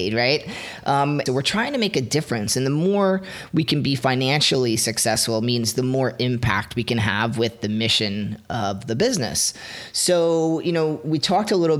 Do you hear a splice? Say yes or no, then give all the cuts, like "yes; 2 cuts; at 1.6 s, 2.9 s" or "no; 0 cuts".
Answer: yes; 1 cut; at 1.3 s